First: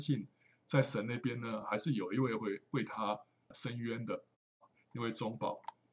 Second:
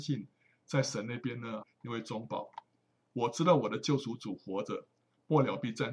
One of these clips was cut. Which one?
second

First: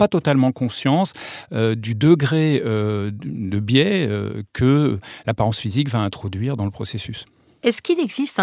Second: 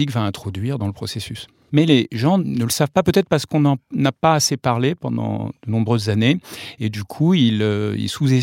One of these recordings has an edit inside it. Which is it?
second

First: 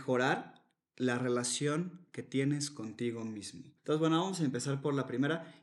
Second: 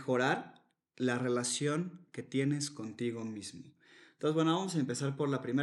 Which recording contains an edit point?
first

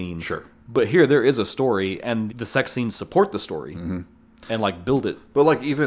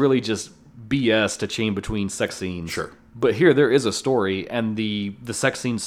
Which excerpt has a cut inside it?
first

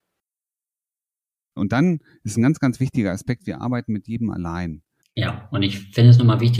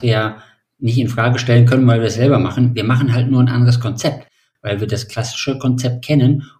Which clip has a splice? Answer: first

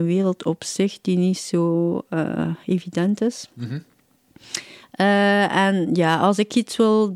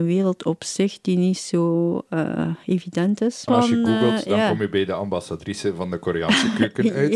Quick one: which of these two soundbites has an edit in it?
second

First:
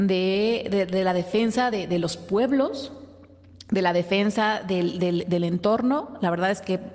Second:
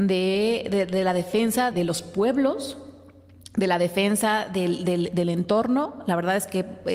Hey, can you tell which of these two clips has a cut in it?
second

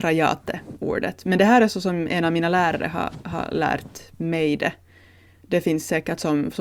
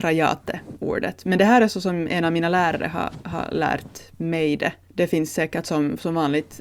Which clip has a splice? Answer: second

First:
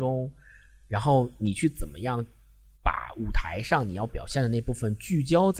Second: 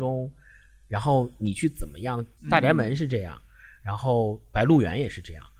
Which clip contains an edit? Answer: second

